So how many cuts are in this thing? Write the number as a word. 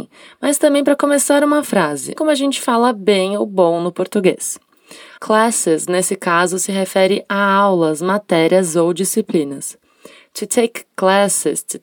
two